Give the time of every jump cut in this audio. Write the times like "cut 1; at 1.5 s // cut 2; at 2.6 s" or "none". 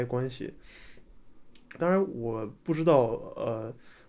cut 1; at 1.8 s